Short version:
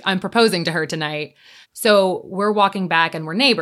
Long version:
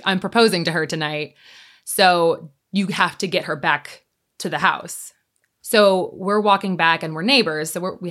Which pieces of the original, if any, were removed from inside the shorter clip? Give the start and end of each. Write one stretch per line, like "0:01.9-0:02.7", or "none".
0:01.6-0:05.5